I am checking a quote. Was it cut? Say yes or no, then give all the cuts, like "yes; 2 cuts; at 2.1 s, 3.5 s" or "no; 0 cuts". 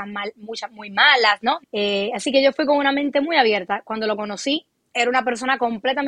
yes; 1 cut; at 1.6 s